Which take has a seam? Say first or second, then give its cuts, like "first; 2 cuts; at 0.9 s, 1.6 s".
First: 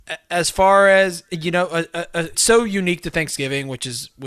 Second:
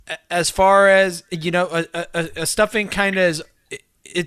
first; 1 cut; at 2.3 s